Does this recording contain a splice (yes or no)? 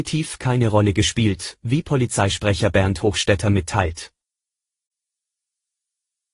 no